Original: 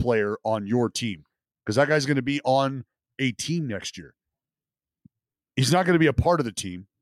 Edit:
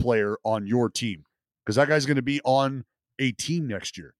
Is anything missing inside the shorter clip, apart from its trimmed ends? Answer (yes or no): no